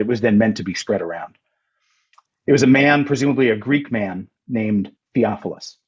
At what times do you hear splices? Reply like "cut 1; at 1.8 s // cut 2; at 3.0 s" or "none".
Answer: none